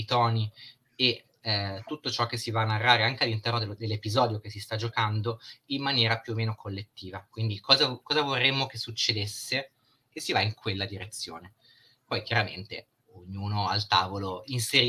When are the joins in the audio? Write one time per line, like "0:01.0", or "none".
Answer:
none